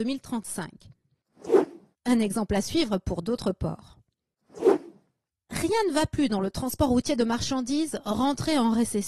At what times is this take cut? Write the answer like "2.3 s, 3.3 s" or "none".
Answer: 1.9 s